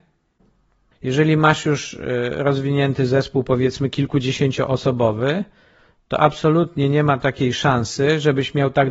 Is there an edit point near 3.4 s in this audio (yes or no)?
no